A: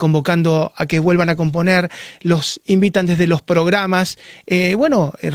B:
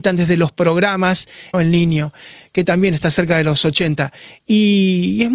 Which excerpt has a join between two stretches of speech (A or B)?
B